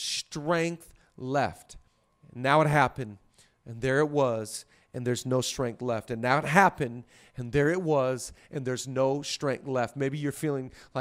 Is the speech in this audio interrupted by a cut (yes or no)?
no